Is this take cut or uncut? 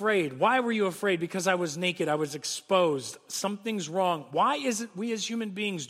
uncut